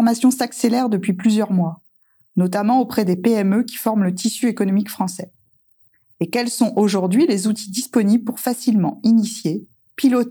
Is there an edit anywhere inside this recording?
no; 0 cuts

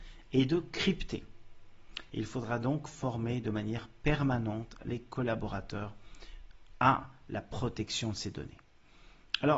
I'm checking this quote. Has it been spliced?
yes; 1 cut; at 2.1 s

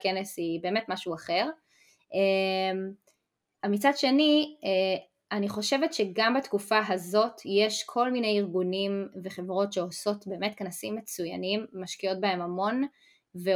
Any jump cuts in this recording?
no; 0 cuts

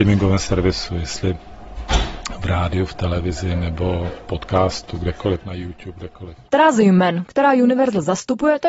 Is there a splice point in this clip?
no; 0 cuts

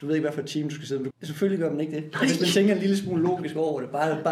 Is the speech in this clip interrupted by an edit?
yes; 1 cut; at 1.1 s

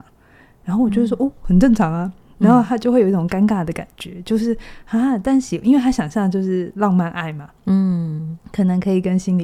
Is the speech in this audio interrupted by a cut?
no; 0 cuts

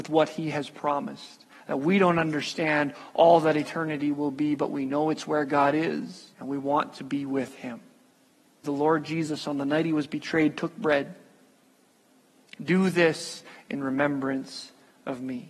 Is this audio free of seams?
no; 3 cuts; at 6.3 s, 8.6 s, 12.6 s

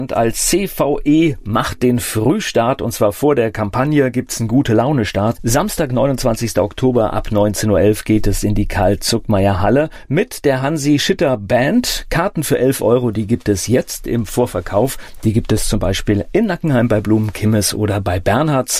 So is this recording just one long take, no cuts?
no; 1 cut; at 5.4 s

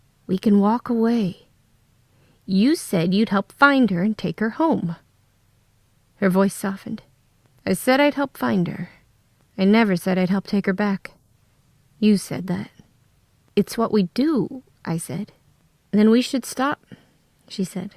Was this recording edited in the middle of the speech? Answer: no; 0 cuts

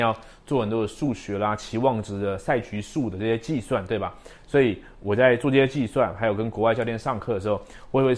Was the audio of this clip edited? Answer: no; 0 cuts

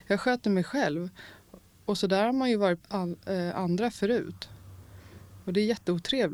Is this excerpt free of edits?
no; 1 cut; at 2.8 s

